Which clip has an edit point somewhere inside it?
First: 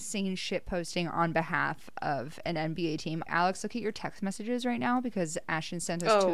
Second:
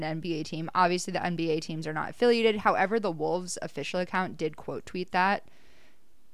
first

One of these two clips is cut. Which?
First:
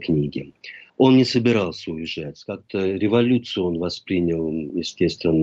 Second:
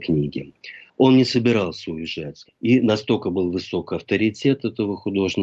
second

